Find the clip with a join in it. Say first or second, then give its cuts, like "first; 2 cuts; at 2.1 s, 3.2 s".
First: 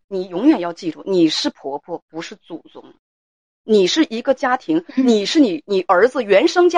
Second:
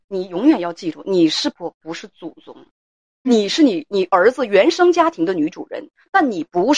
second; 2 cuts; at 1.5 s, 3.2 s